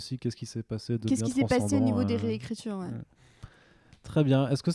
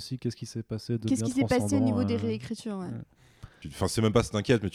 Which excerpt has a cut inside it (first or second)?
second